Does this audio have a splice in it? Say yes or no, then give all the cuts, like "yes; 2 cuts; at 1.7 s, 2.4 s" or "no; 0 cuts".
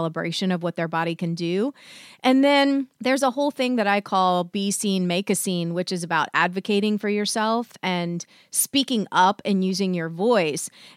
no; 0 cuts